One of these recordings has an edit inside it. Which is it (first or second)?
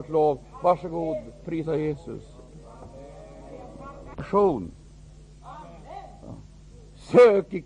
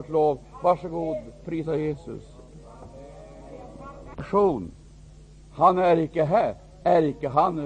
first